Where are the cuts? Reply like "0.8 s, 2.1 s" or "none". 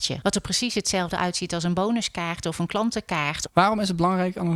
3.5 s

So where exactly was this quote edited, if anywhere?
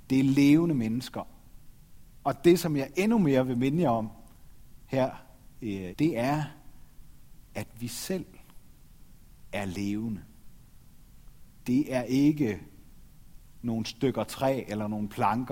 5.9 s, 11.6 s

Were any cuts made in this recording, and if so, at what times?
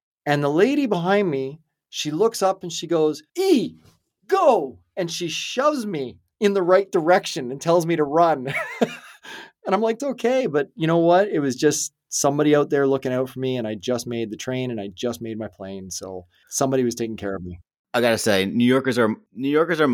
3.3 s, 10.0 s

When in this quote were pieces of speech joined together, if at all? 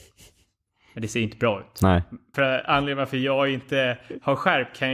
2.3 s

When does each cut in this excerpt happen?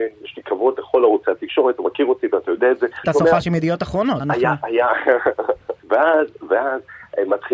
3.0 s, 4.2 s, 5.8 s

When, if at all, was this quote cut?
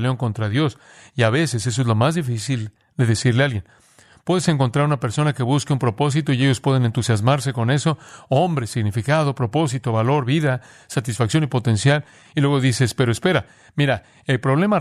none

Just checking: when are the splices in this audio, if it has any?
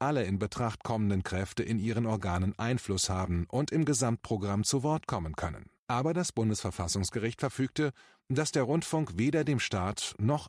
5.8 s

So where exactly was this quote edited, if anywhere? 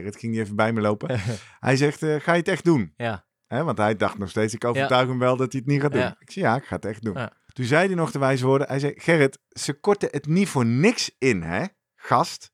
7.5 s

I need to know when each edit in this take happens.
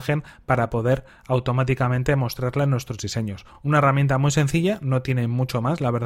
none

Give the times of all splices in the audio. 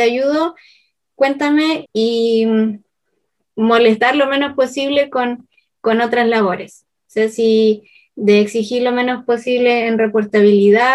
1.9 s

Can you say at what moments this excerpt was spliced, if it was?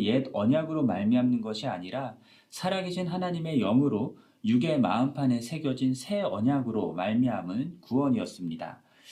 none

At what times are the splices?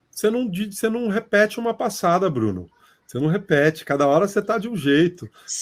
none

